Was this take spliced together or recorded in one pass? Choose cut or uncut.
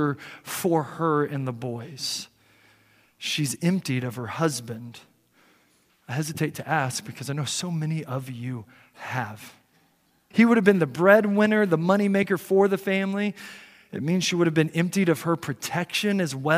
cut